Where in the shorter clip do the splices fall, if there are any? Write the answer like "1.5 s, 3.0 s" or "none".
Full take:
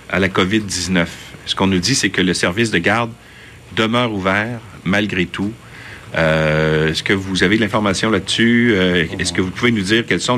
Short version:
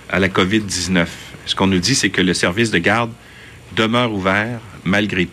none